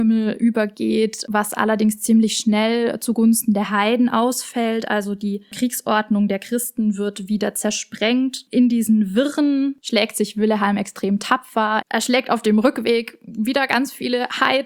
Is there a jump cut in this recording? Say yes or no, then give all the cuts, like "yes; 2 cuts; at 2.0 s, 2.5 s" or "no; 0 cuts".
yes; 1 cut; at 11.8 s